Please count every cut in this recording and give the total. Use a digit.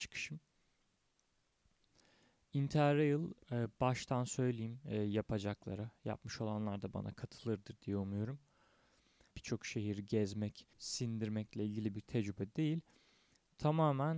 3